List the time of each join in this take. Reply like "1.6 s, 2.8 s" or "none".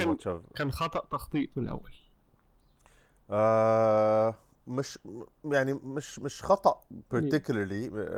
none